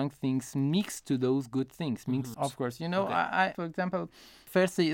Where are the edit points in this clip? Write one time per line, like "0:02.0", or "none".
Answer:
0:02.3
0:03.5

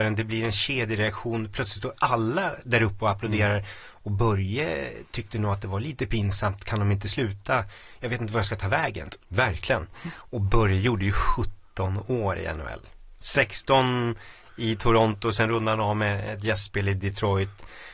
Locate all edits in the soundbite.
0:09.2

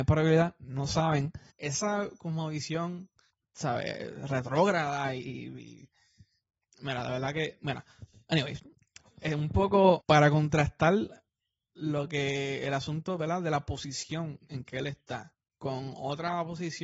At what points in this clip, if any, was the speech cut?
0:01.5

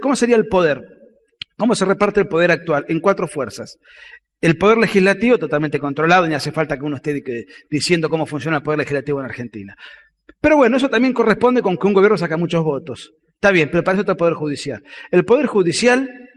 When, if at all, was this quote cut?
none

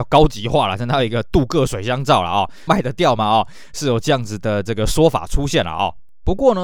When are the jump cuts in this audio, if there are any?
0:02.7

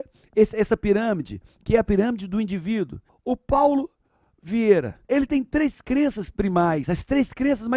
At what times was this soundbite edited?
0:03.1
0:05.0

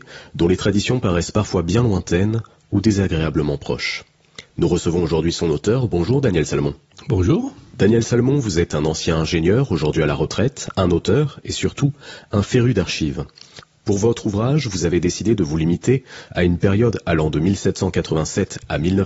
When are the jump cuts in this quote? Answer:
none

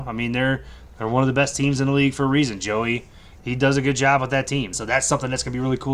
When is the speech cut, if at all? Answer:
0:03.4
0:04.7

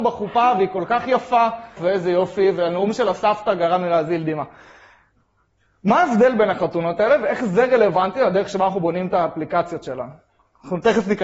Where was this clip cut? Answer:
0:01.8

